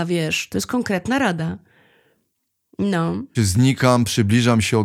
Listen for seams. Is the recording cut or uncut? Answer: cut